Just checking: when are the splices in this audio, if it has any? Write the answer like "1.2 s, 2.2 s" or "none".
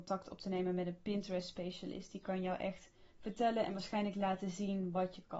none